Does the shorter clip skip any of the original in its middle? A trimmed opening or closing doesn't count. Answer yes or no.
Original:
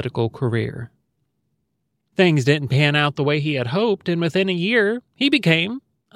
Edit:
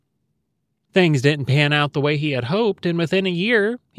no